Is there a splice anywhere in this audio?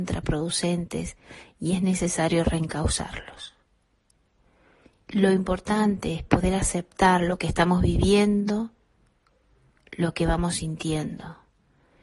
yes; 1 cut; at 5.1 s

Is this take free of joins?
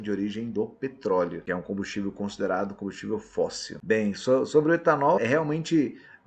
no; 1 cut; at 5.2 s

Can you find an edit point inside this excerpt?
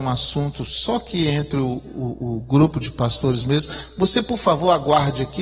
no; 0 cuts

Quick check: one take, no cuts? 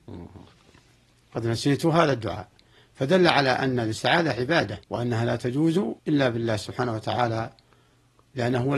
no; 2 cuts; at 4.8 s, 6.0 s

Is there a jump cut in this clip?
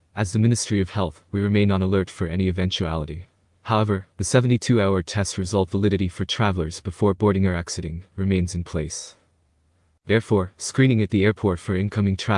no; 0 cuts

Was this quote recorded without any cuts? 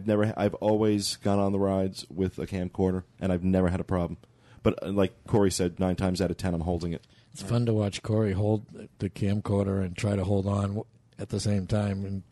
no; 1 cut; at 3.2 s

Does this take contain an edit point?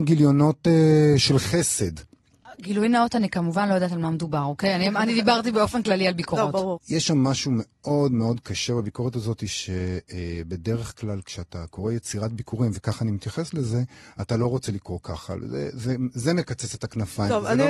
yes; 1 cut; at 6.8 s

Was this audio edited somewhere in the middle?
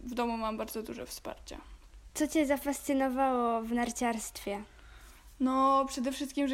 no; 0 cuts

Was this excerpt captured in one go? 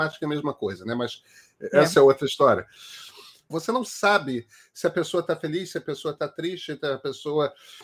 no; 1 cut; at 3.5 s

